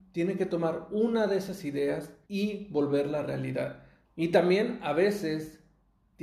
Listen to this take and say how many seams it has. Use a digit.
2